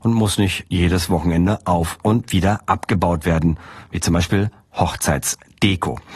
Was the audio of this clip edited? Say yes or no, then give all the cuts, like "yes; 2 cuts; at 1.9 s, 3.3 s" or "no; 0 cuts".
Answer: no; 0 cuts